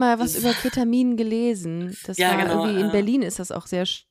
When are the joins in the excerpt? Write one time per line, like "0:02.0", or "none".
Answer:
none